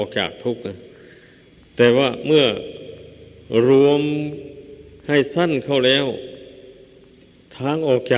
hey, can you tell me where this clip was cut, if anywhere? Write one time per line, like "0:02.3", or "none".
none